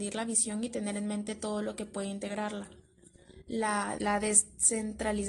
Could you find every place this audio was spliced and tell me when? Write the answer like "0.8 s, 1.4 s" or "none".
4.0 s